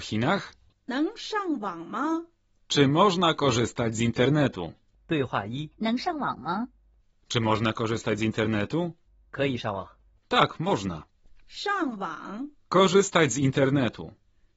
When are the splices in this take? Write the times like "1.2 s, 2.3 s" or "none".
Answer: 5.7 s